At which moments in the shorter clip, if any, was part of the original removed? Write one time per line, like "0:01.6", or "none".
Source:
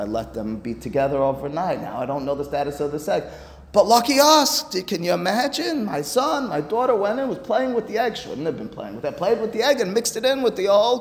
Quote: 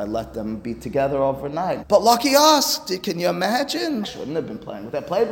0:01.8
0:04.0